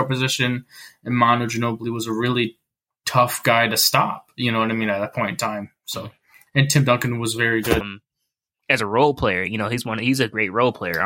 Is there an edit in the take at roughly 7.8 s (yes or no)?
yes